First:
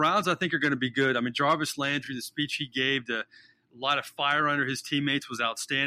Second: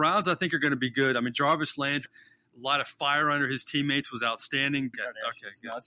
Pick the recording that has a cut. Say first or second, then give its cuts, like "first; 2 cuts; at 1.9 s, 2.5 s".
second; 2 cuts; at 2.1 s, 4.9 s